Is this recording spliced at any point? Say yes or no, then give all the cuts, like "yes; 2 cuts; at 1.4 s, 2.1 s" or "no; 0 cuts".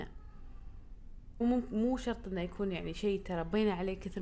yes; 1 cut; at 1.4 s